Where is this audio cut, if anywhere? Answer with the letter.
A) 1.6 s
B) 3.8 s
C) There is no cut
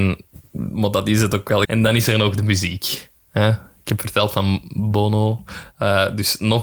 A